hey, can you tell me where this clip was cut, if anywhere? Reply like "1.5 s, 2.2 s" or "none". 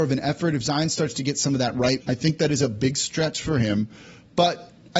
2.0 s